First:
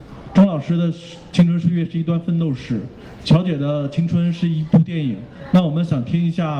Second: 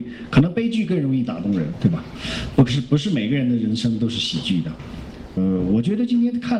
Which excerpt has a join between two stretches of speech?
second; 2 cuts; at 1.7 s, 5.4 s

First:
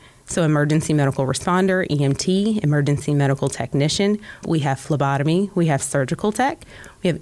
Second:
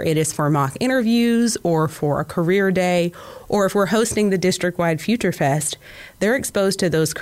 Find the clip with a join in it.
first; 1 cut; at 4.4 s

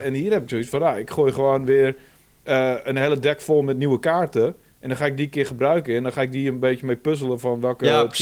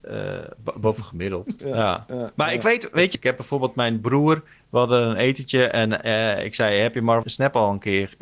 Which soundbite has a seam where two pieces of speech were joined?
second; 3 cuts; at 1.6 s, 3.2 s, 7.2 s

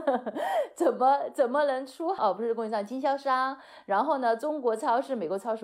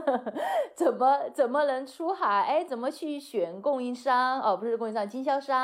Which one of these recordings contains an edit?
first; 1 cut; at 2.2 s

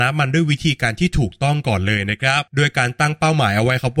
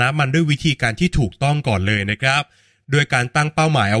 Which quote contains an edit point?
first; 1 cut; at 2.5 s

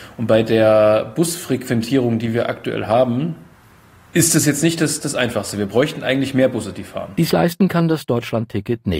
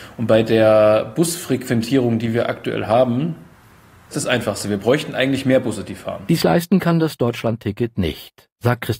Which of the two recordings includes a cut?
second; 1 cut; at 4.1 s

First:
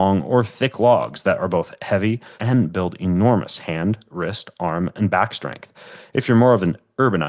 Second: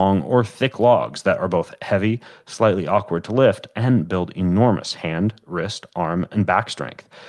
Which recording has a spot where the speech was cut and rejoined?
first; 1 cut; at 2.4 s

